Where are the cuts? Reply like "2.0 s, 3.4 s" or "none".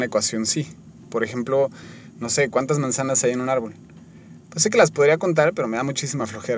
none